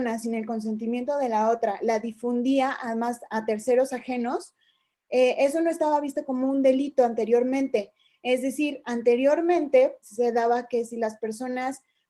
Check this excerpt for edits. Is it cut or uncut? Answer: cut